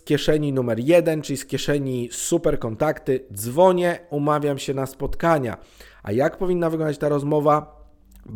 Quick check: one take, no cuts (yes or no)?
yes